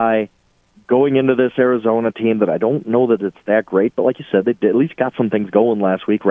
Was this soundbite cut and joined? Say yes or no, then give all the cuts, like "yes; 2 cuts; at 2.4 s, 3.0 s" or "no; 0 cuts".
no; 0 cuts